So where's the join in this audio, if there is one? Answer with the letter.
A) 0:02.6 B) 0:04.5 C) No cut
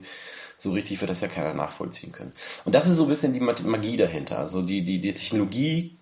C